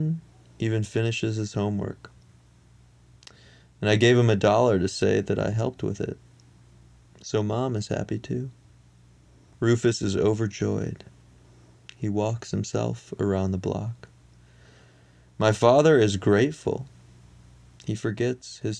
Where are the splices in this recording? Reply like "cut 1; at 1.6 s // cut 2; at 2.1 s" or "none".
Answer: cut 1; at 9.5 s